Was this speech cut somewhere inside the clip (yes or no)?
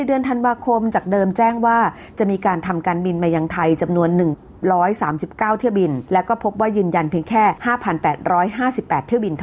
yes